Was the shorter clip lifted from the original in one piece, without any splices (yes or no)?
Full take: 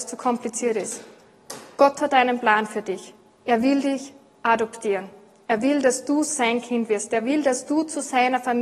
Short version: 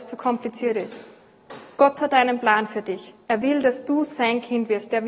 no